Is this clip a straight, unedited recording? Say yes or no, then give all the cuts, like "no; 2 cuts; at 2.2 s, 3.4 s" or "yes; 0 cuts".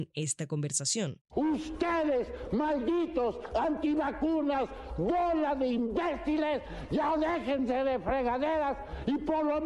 no; 1 cut; at 1.3 s